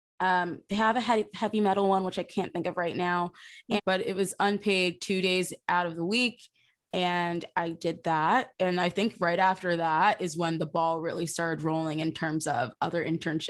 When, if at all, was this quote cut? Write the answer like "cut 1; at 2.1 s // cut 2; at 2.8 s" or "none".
cut 1; at 3.8 s